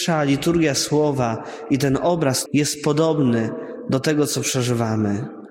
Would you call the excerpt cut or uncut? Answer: cut